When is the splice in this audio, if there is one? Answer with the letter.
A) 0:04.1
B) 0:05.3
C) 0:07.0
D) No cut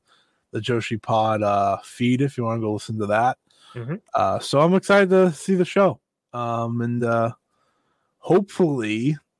D